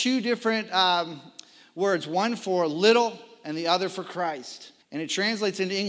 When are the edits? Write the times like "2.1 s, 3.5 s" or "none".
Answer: 4.8 s

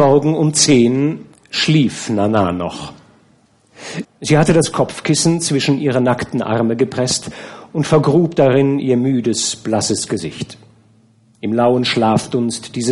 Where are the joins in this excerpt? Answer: 4.0 s

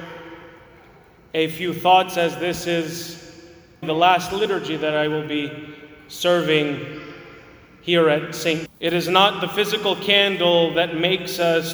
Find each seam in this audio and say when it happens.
3.8 s, 8.7 s

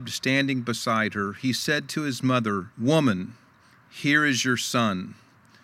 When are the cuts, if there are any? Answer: 2.7 s

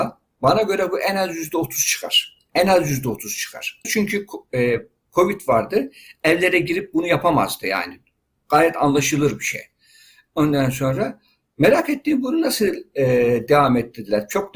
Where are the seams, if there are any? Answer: 3.8 s

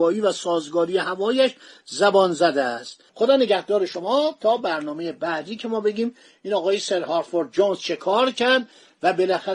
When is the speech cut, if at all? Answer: 3.1 s

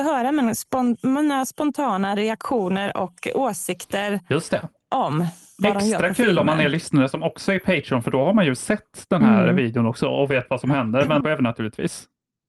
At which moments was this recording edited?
11.2 s

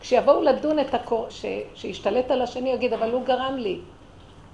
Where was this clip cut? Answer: 1.3 s

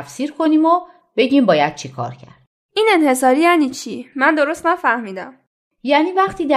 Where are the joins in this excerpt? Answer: 4.1 s

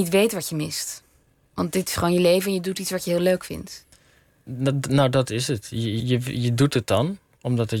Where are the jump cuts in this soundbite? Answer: 6.0 s

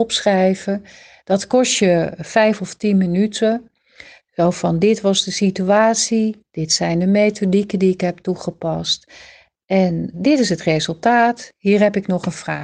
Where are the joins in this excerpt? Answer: 10.1 s

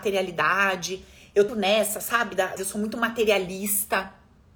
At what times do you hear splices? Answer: 1.5 s, 2.6 s

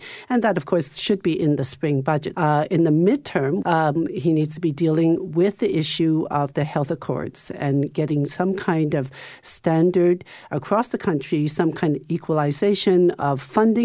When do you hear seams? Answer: 2.3 s, 3.6 s

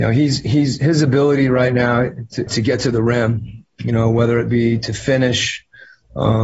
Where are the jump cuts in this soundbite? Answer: 2.5 s

